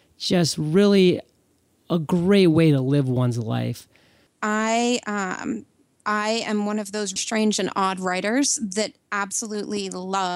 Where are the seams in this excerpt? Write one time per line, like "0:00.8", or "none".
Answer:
0:04.3
0:07.2